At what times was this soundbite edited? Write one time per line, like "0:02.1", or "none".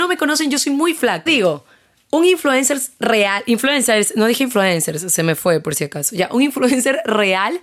0:01.3